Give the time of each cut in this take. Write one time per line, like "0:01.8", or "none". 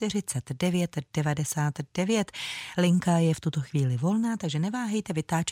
none